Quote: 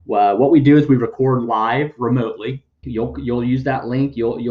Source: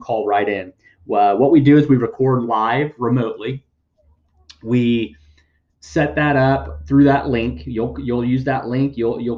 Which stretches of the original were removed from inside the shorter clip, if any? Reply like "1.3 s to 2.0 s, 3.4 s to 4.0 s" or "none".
3.8 s to 7.6 s